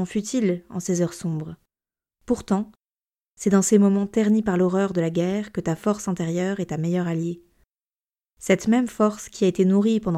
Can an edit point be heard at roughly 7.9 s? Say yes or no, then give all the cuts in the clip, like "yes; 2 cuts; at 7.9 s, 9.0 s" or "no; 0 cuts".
no; 0 cuts